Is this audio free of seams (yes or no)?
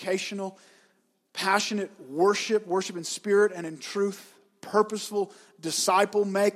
yes